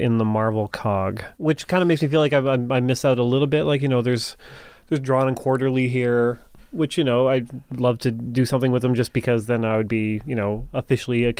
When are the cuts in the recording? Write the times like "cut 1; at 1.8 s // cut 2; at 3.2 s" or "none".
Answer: cut 1; at 1.3 s